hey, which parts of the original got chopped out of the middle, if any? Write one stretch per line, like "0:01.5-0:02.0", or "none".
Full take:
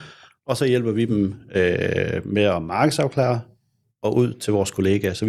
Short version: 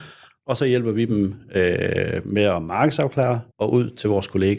0:03.5-0:03.9